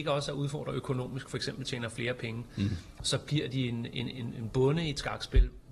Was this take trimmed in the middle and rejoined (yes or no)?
no